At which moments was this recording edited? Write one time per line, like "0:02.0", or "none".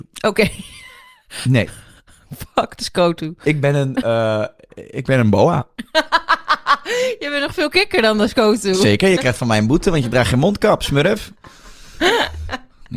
none

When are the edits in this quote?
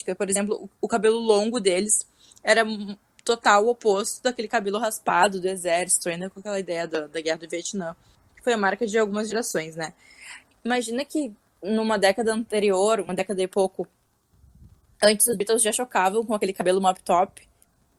0:10.5

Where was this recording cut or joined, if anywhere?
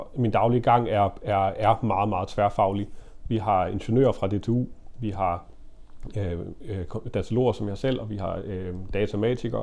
none

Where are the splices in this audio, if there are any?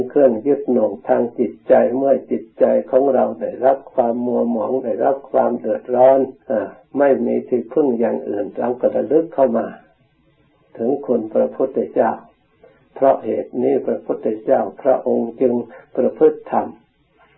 0:06.4

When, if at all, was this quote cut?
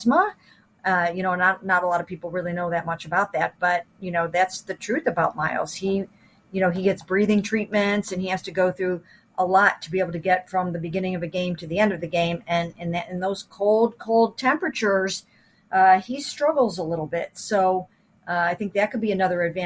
none

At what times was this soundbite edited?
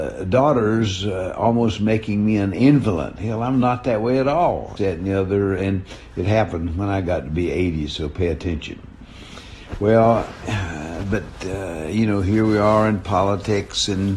0:04.8

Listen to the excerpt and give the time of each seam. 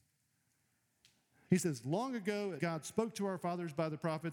0:01.5
0:02.6

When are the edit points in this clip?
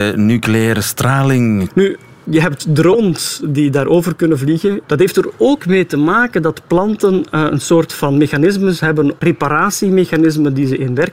0:01.7
0:04.8

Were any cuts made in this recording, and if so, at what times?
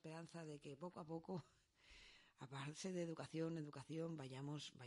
0:03.6

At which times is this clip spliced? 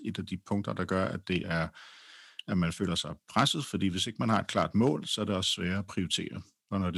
none

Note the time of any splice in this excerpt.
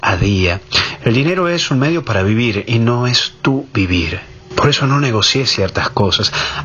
none

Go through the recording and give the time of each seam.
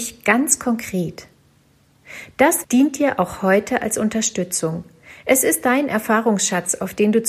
0:02.6

